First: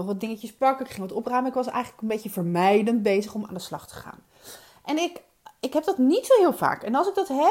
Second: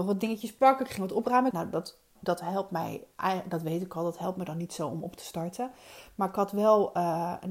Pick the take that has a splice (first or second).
second